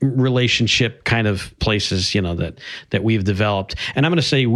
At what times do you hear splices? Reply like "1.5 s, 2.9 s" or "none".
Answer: none